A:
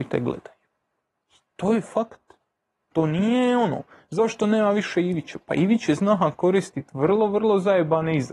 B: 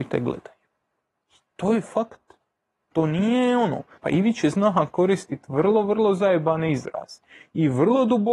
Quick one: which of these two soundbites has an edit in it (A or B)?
B